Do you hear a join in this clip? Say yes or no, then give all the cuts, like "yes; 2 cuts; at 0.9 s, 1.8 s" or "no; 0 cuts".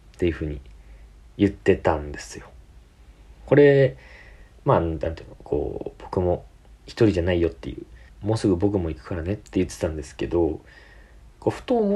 yes; 2 cuts; at 8.1 s, 9.4 s